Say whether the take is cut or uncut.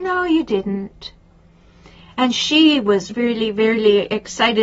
cut